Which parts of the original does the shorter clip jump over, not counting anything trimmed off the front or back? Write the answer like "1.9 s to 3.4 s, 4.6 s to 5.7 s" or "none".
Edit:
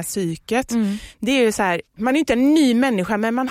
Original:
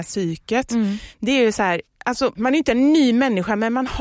1.9 s to 2.3 s